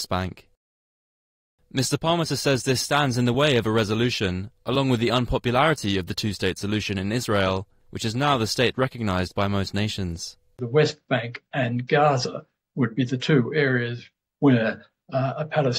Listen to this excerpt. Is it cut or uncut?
uncut